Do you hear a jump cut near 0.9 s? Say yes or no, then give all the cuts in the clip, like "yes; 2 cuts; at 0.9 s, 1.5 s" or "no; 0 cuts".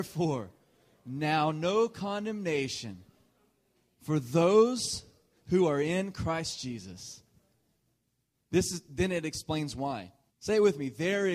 no; 1 cut; at 10.3 s